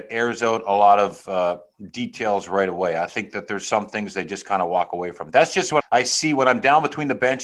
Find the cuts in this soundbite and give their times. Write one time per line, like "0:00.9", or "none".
0:05.8